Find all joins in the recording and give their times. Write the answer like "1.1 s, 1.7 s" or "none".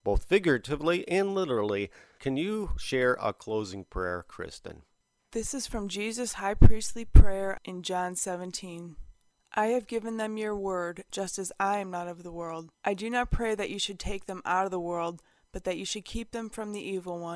11.1 s, 12.7 s